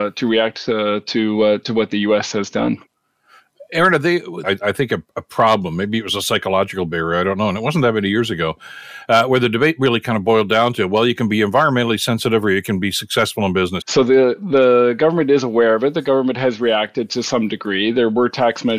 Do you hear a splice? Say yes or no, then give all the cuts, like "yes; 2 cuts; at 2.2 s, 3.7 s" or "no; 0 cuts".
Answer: yes; 2 cuts; at 4.4 s, 13.8 s